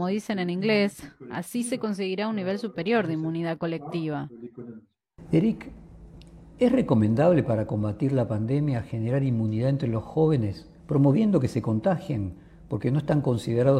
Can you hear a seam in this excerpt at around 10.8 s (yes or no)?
yes